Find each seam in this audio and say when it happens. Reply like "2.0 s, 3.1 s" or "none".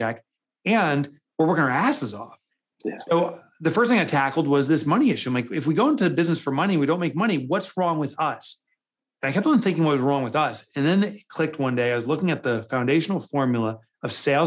none

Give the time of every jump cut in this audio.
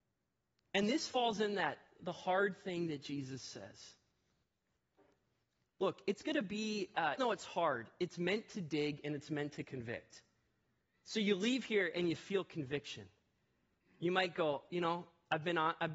7.2 s

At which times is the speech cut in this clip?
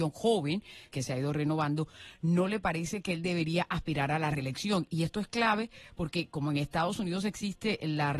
0.9 s

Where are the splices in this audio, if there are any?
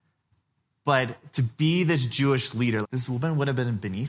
2.8 s

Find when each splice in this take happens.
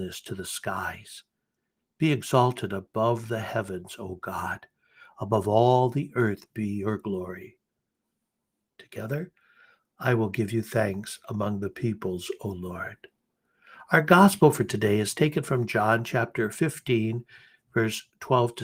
8.7 s

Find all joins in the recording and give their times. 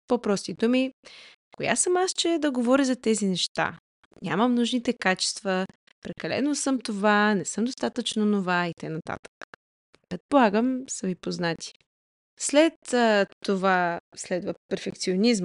5.9 s

